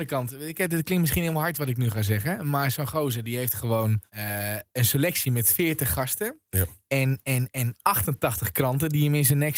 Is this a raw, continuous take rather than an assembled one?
no; 1 cut; at 4.1 s

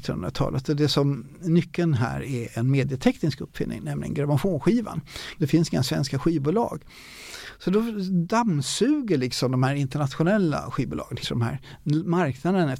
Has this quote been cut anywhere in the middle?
yes; 2 cuts; at 5.4 s, 11.2 s

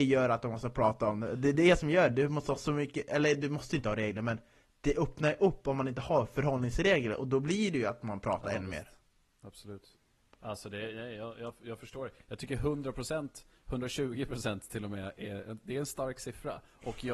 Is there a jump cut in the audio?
no; 0 cuts

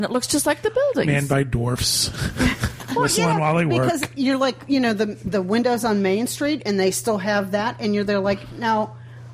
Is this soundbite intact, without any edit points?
yes; 0 cuts

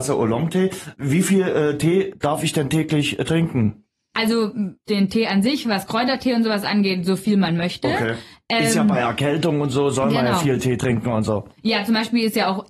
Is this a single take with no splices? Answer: yes; 0 cuts

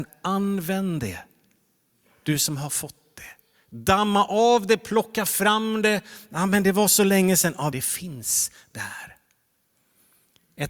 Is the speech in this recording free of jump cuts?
no; 1 cut; at 7.7 s

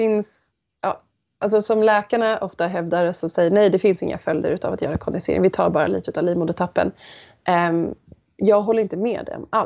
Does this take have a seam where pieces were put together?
no; 0 cuts

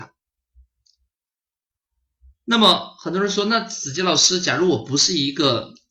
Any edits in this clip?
no; 0 cuts

